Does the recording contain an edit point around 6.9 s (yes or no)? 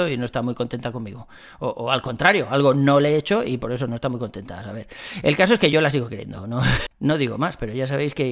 yes